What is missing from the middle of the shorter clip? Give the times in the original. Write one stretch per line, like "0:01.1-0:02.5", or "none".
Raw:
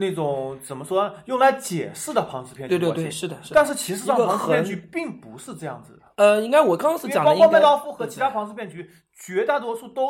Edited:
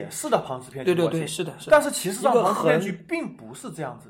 none